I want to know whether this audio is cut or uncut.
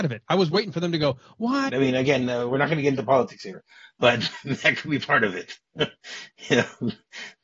cut